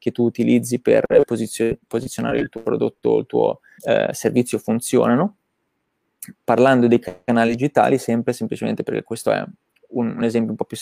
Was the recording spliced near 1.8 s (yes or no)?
no